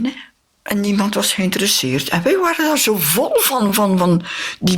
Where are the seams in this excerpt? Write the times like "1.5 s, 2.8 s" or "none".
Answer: none

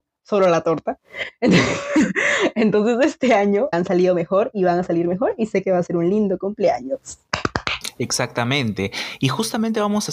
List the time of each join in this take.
3.7 s

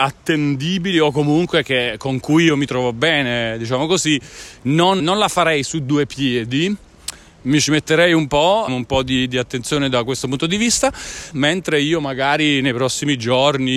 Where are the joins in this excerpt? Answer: 5.0 s, 8.7 s, 11.3 s

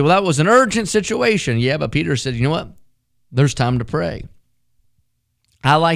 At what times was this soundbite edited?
none

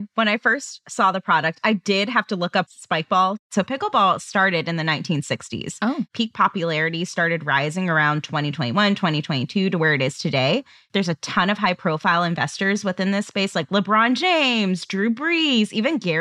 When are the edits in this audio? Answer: none

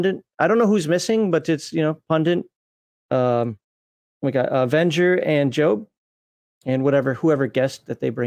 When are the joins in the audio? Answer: none

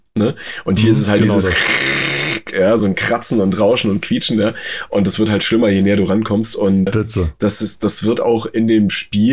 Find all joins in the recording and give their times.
2.8 s, 6.9 s, 8.2 s

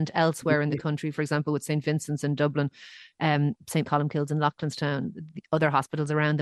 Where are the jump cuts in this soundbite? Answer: 3.8 s

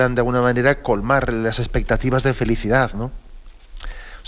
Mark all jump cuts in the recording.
none

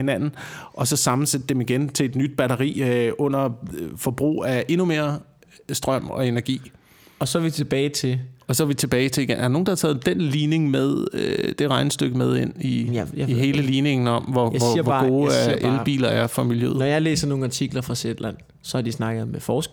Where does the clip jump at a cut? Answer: none

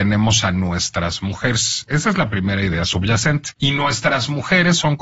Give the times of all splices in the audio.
1.9 s, 3.5 s

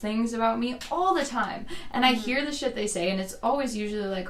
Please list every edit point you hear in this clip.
none

